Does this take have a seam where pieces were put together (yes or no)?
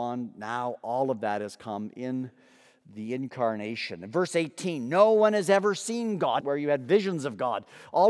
yes